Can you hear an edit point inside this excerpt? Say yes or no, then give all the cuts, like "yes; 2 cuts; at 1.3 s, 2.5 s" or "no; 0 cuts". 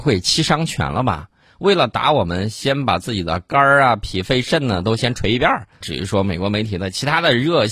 yes; 1 cut; at 5.8 s